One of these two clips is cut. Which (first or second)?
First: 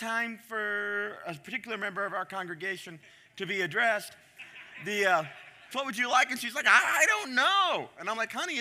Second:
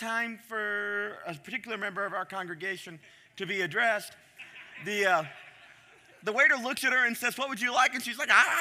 first